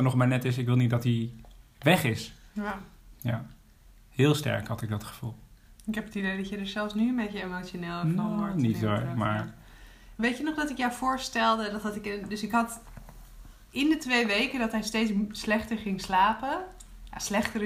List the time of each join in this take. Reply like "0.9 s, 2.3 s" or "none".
none